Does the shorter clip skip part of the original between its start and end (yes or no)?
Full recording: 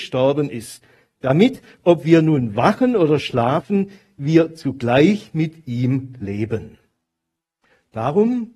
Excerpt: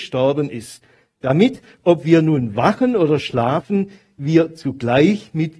no